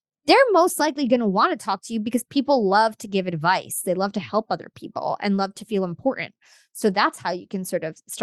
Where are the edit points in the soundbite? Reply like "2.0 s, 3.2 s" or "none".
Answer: none